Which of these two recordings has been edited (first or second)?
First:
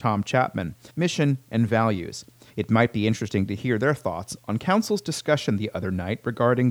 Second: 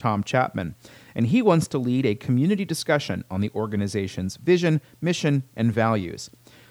first